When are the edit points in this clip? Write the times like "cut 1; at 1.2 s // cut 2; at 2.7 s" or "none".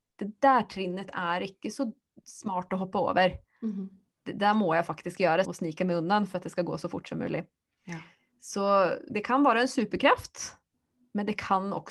cut 1; at 5.4 s // cut 2; at 9.1 s